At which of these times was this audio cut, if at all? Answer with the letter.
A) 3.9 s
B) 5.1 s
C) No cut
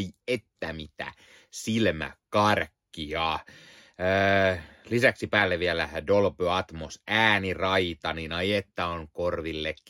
C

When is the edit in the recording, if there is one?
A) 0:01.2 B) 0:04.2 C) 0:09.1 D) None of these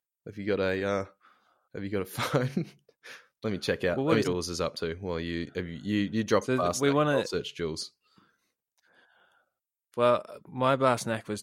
B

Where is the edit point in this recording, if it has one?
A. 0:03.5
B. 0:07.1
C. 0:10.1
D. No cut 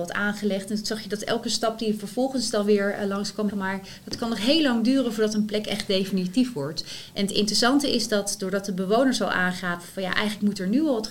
A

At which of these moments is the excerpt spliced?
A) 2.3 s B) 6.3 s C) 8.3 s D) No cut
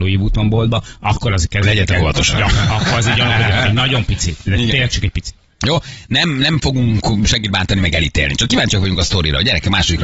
D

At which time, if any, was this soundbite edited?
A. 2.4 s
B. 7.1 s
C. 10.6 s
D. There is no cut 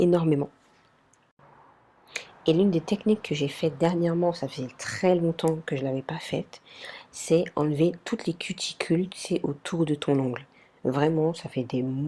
D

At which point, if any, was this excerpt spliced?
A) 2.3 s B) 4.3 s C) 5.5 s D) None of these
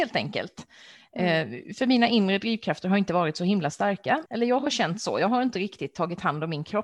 B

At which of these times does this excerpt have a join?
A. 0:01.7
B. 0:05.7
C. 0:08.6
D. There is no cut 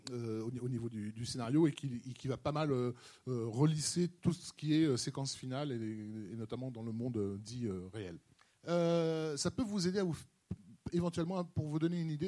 C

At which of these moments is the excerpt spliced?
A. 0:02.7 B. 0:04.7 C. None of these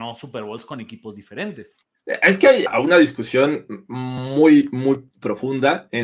A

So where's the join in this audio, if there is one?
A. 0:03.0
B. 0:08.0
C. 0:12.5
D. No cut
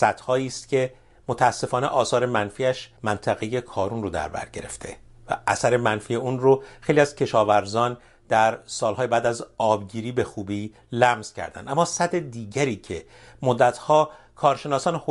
A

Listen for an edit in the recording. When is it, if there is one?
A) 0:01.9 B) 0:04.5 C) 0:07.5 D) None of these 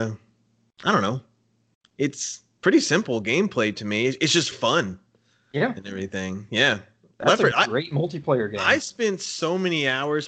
B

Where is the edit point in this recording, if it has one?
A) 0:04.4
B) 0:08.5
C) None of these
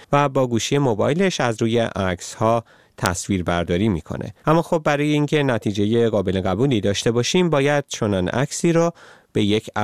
A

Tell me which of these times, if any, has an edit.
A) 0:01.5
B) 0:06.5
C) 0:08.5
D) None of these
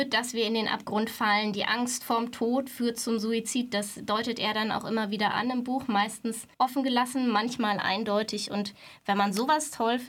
B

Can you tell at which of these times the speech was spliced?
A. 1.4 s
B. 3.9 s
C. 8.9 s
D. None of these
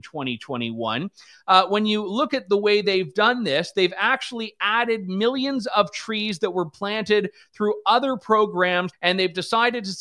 C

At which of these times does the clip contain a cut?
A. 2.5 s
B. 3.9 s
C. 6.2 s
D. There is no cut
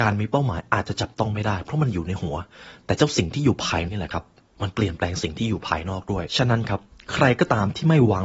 B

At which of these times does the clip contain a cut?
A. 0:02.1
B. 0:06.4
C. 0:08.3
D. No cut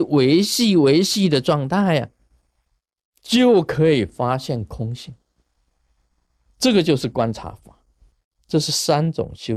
C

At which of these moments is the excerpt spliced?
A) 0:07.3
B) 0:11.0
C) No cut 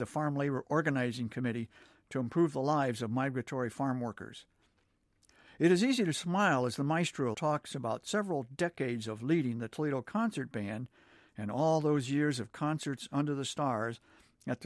A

